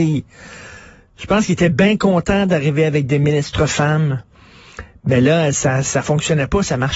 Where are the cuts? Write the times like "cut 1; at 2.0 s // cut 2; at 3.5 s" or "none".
none